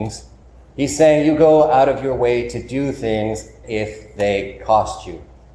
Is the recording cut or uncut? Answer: cut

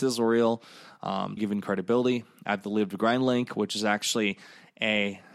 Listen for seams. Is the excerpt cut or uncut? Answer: cut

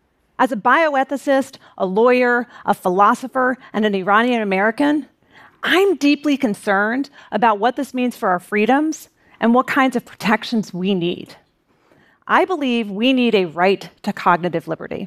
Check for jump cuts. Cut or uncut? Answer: uncut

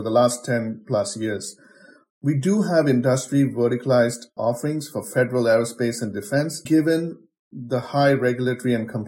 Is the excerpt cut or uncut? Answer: cut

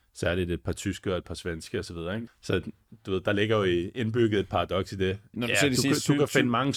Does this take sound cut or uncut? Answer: cut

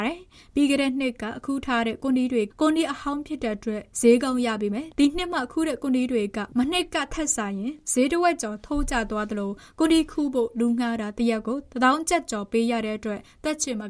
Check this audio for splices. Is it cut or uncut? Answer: cut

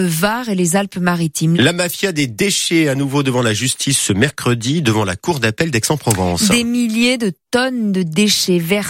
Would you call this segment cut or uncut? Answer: cut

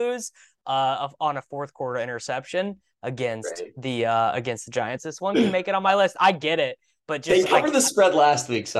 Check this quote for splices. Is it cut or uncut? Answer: cut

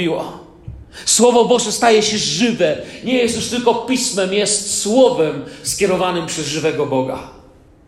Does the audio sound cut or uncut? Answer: uncut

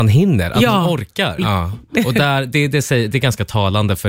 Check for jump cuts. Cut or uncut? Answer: cut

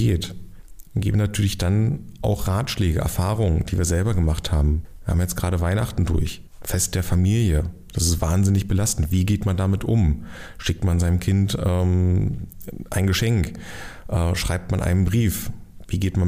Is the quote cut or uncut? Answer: uncut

